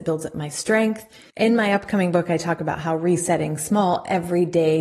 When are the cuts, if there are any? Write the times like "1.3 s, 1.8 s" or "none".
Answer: 1.3 s